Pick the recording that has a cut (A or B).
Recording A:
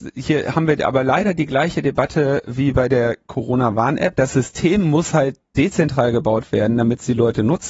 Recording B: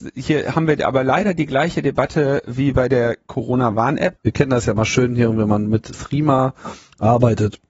B